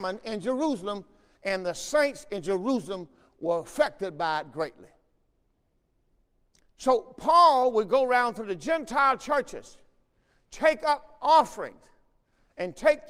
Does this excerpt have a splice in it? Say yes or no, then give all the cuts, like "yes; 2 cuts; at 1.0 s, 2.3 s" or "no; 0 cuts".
no; 0 cuts